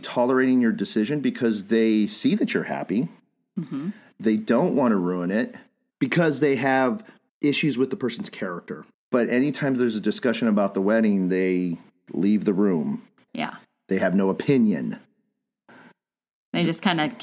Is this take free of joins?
no; 2 cuts; at 8.9 s, 13.3 s

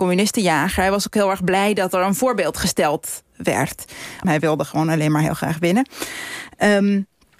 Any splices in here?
yes; 1 cut; at 4.2 s

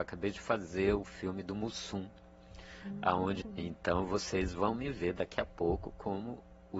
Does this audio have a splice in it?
yes; 1 cut; at 3.4 s

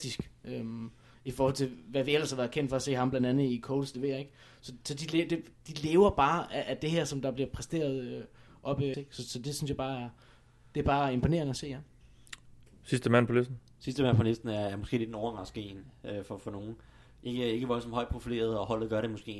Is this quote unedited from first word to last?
no; 1 cut; at 8.9 s

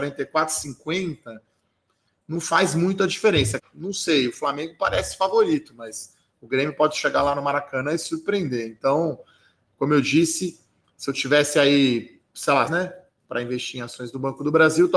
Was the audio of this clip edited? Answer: yes; 2 cuts; at 3.6 s, 12.7 s

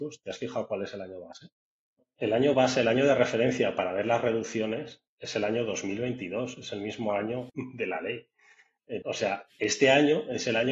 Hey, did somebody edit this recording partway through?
yes; 2 cuts; at 7.5 s, 9.0 s

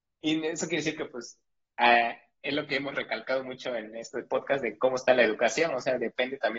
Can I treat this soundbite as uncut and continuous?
yes; 0 cuts

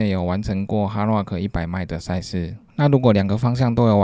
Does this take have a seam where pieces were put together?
yes; 1 cut; at 2.7 s

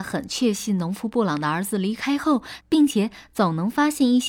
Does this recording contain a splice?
yes; 1 cut; at 2.6 s

